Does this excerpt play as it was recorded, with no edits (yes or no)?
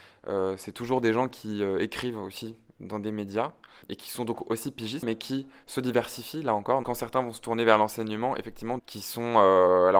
no